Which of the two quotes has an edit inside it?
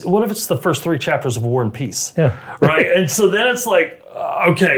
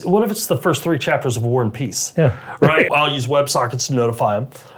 second; 1 cut; at 2.9 s

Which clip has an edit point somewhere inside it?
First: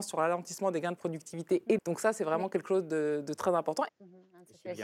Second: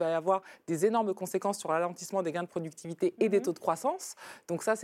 first; 2 cuts; at 1.8 s, 3.9 s

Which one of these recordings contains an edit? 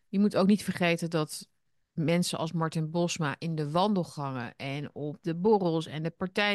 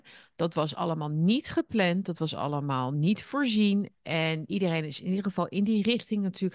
second; 1 cut; at 3.9 s

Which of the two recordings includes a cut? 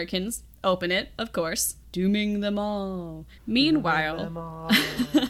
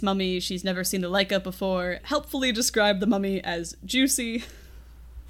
second; 1 cut; at 2.0 s

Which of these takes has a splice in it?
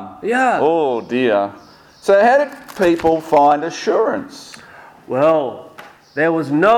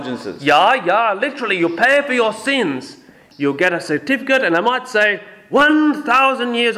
second; 1 cut; at 3.3 s

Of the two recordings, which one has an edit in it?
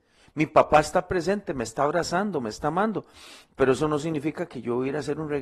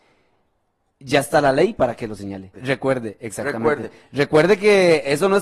second; 1 cut; at 2.5 s

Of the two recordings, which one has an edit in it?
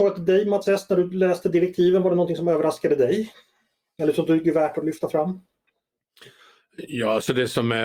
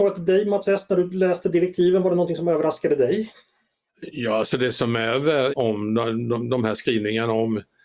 second; 2 cuts; at 3.9 s, 5.5 s

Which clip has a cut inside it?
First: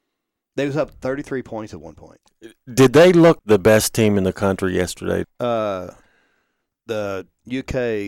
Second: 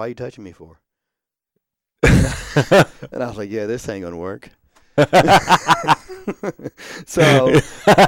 first; 2 cuts; at 3.4 s, 5.2 s

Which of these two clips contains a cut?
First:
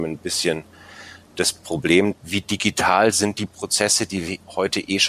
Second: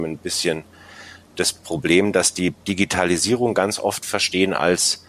first; 1 cut; at 2.1 s

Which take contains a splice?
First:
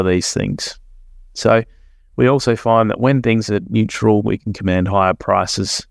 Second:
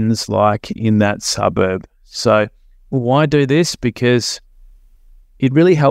first; 1 cut; at 4.2 s

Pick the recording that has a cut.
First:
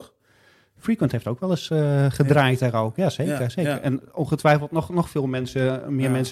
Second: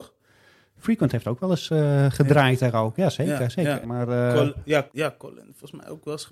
second; 2 cuts; at 3.8 s, 4.9 s

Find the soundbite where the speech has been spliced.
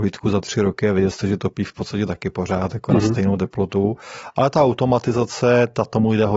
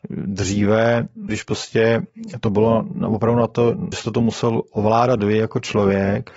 second; 2 cuts; at 1.3 s, 3.9 s

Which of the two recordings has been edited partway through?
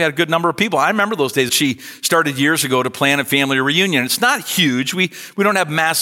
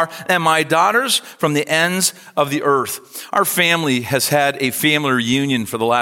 first; 1 cut; at 1.5 s

